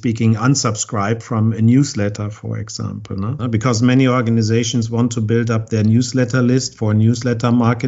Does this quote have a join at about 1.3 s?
no; 1 cut; at 3.4 s

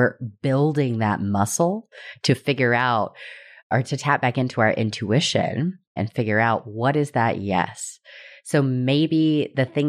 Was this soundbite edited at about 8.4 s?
no; 1 cut; at 6.0 s

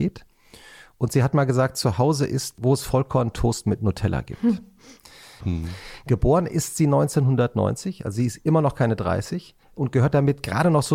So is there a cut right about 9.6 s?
yes; 2 cuts; at 5.4 s, 9.6 s

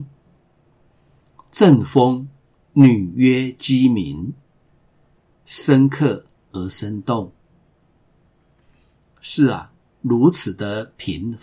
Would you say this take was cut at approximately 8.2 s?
no; 2 cuts; at 5.3 s, 9.9 s

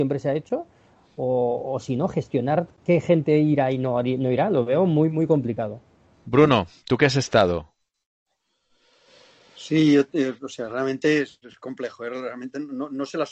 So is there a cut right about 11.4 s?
yes; 1 cut; at 11.4 s

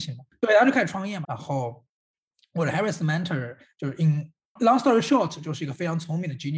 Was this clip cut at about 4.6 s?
yes; 2 cuts; at 1.2 s, 4.6 s

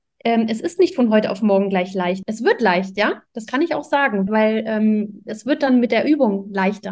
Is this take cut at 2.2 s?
yes; 2 cuts; at 2.2 s, 4.3 s

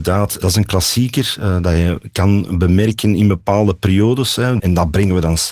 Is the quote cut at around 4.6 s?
yes; 1 cut; at 4.6 s

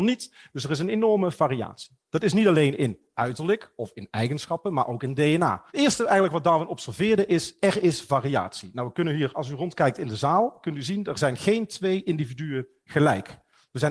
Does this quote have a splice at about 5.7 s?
yes; 1 cut; at 5.7 s

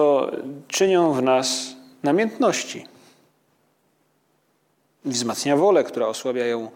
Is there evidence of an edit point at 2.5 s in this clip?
no; 1 cut; at 4.8 s

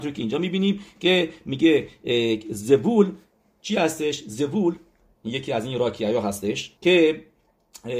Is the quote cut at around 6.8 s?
yes; 1 cut; at 6.8 s

